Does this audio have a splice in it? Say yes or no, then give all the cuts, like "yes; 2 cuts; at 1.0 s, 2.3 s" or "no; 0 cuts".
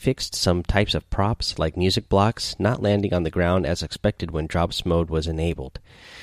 no; 0 cuts